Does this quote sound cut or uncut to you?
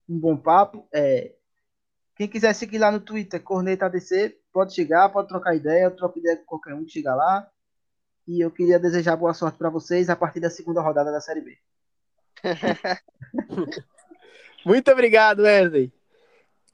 uncut